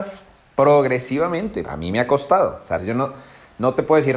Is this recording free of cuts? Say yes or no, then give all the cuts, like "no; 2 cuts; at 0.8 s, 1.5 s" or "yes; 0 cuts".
no; 2 cuts; at 1.6 s, 2.8 s